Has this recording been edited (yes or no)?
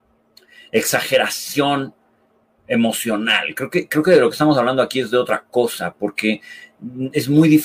no